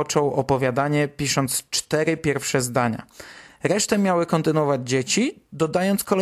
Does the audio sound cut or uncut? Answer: uncut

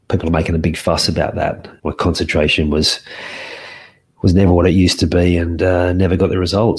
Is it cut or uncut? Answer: cut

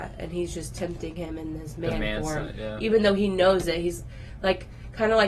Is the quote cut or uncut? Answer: uncut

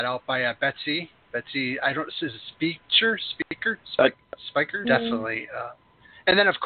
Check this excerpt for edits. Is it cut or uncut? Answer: cut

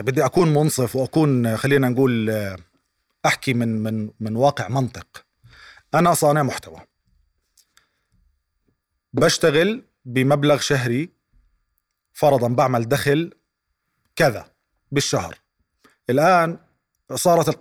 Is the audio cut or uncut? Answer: uncut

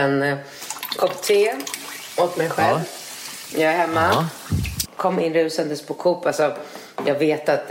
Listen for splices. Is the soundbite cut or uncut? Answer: cut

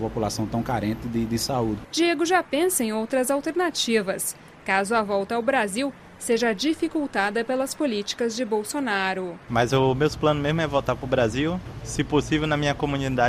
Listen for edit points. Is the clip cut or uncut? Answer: cut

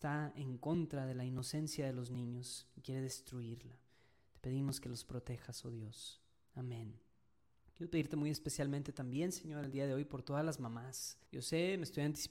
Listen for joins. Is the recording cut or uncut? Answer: cut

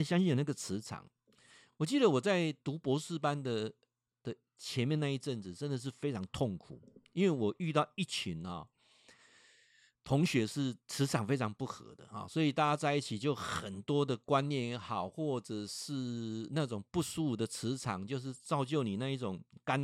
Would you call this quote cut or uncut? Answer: uncut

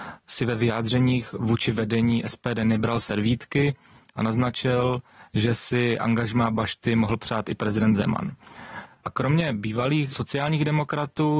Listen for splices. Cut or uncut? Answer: uncut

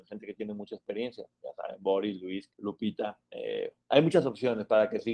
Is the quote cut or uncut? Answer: cut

